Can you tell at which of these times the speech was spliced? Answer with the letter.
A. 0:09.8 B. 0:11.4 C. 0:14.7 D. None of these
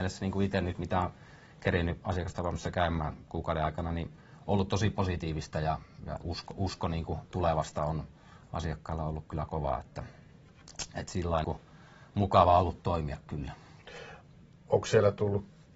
B